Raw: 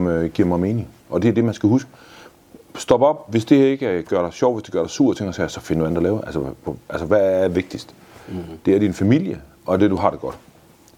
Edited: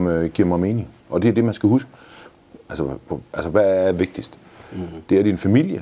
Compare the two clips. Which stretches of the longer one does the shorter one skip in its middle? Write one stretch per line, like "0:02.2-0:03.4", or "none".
0:02.7-0:06.3

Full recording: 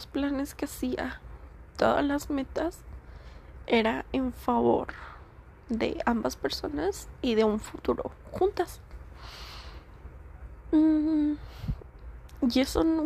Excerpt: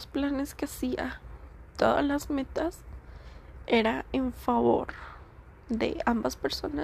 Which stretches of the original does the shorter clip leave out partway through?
none

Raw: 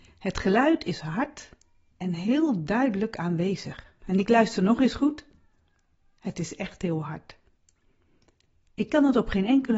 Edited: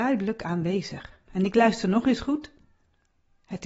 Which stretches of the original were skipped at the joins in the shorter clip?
none

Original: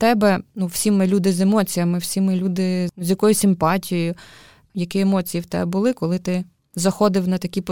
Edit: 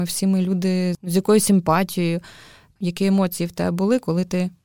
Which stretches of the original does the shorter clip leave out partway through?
none

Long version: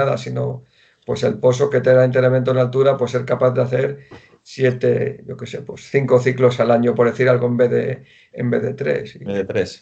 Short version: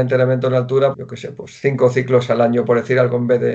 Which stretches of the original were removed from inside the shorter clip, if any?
0:03.0-0:05.2

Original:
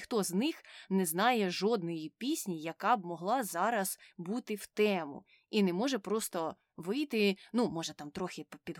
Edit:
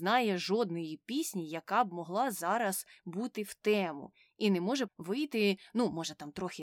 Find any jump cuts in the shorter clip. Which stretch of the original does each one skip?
0:06.0-0:06.7

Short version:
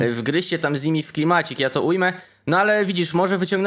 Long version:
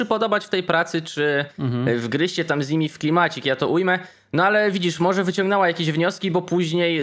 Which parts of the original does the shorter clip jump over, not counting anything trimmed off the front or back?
none

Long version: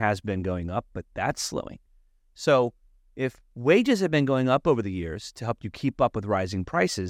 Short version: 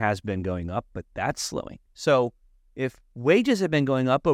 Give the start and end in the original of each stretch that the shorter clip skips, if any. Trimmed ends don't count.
0:01.9-0:02.3

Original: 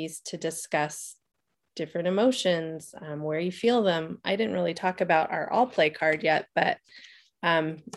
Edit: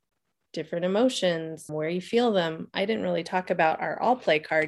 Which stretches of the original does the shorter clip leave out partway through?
0:02.9-0:03.2

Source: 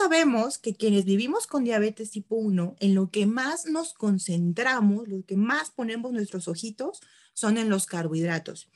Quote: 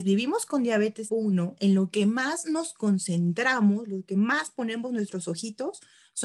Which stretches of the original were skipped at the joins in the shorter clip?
0:02.1-0:02.3

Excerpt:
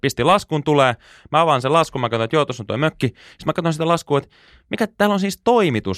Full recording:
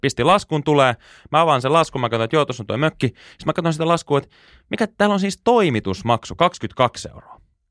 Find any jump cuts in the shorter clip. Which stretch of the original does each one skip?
none

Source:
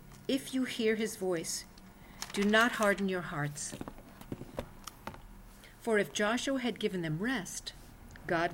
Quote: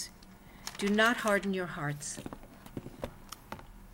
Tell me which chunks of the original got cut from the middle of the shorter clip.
none

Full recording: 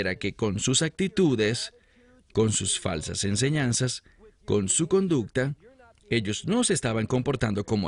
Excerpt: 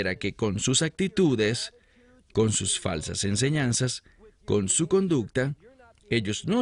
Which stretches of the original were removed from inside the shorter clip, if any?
none

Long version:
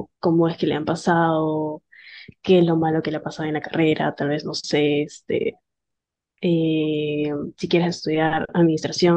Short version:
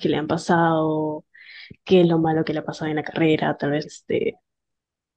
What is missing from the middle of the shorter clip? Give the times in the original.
0:04.4-0:05.0

